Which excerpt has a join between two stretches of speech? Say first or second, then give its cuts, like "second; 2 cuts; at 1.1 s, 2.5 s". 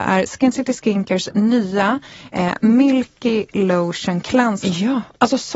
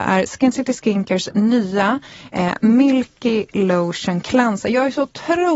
first; 1 cut; at 4.6 s